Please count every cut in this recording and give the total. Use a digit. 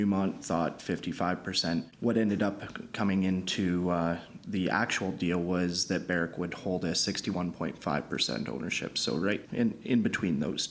1